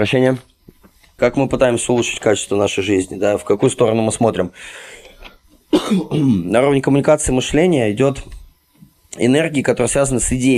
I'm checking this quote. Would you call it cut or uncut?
cut